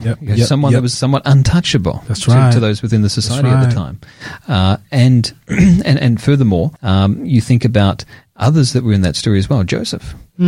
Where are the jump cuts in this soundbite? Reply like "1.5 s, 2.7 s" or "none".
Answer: 6.8 s